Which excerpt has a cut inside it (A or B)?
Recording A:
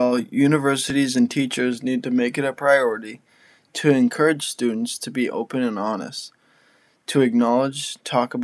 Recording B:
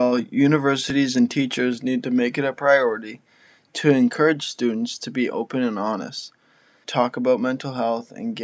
B